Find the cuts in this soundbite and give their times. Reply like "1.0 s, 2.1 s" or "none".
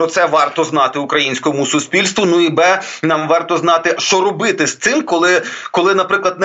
4.0 s

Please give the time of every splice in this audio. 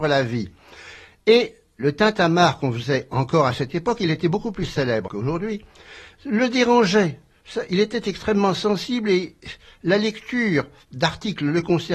5.1 s

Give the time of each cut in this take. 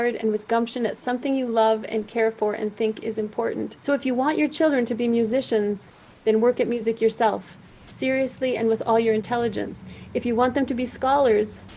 3.8 s

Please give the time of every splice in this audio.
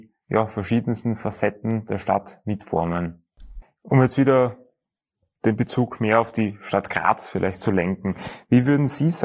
3.6 s

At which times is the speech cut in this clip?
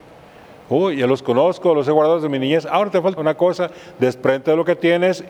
3.2 s

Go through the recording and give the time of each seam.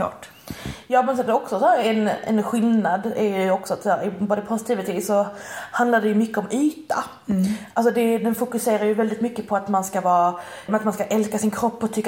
10.7 s

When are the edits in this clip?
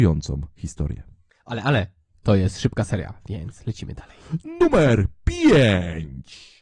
none

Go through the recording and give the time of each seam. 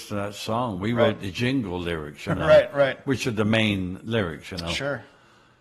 none

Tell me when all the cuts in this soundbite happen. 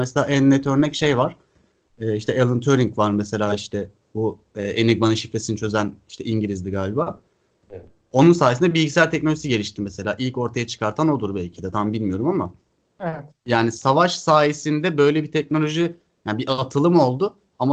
none

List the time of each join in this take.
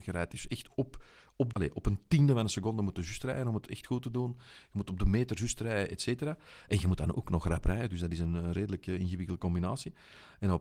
1.5 s

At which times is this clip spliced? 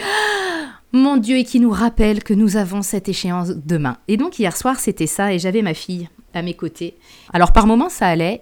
7.3 s

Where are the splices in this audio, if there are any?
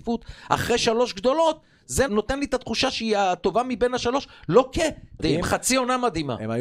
2.1 s, 5.2 s

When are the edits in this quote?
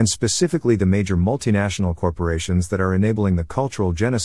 none

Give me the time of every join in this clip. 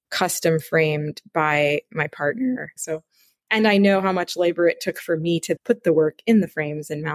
2.8 s, 5.6 s

